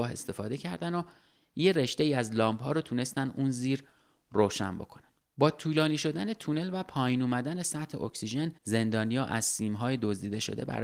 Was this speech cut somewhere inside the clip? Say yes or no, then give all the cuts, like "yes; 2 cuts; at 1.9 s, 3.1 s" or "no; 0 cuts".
yes; 2 cuts; at 5.2 s, 8.6 s